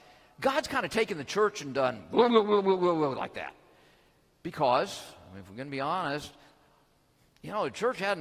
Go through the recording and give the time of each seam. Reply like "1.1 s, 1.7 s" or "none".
none